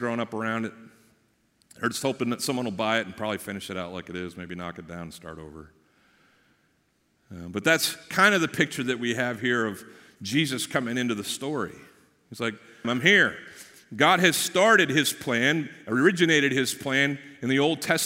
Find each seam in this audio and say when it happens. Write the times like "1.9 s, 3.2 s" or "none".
12.8 s